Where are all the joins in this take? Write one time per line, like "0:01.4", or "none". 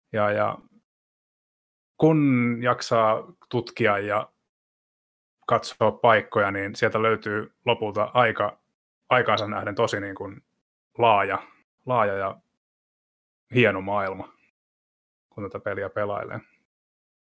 none